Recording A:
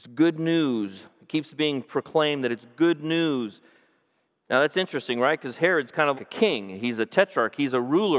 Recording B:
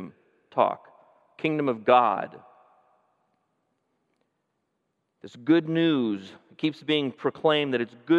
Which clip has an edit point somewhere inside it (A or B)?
A